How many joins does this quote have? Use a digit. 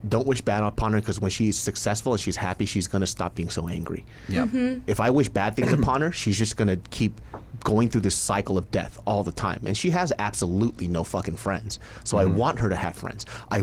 0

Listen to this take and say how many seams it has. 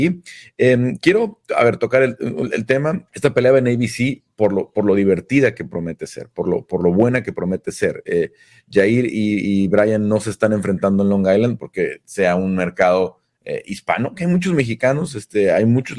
1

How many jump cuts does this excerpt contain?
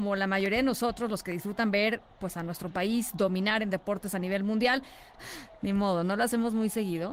1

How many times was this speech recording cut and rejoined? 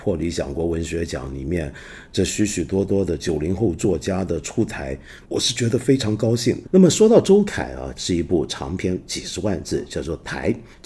3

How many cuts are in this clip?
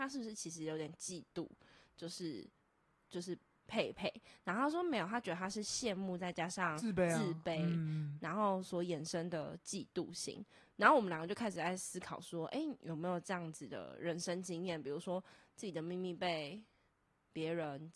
0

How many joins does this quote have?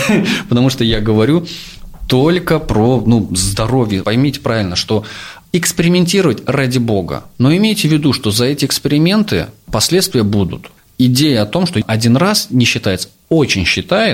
1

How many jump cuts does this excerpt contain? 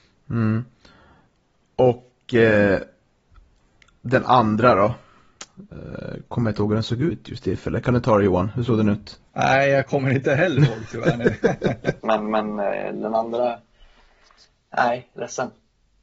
2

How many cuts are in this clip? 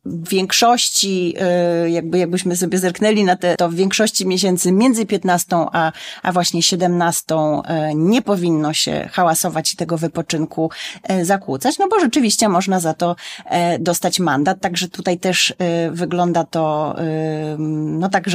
1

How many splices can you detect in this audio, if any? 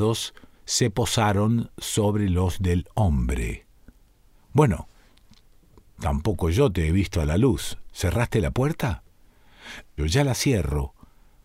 1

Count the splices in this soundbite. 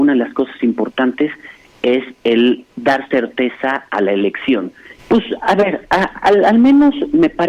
1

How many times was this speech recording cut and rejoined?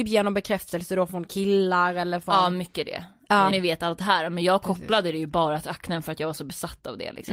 1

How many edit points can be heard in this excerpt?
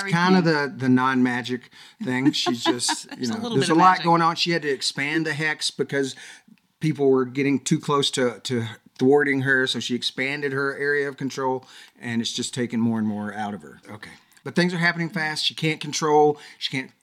1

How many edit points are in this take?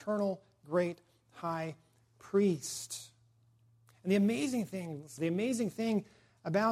1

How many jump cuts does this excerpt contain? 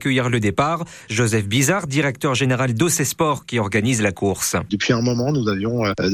0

